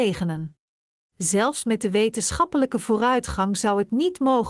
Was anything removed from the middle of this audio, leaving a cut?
yes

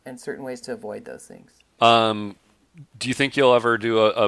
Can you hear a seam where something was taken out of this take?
yes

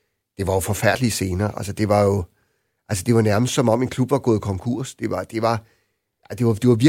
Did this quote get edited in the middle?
no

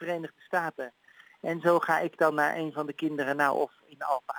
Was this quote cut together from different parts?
no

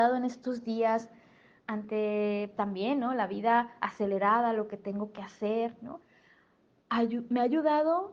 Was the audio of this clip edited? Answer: yes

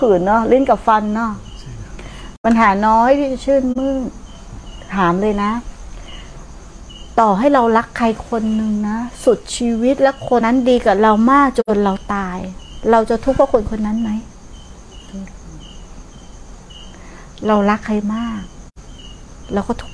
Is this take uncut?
no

